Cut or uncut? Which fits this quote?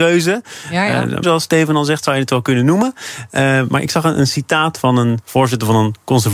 cut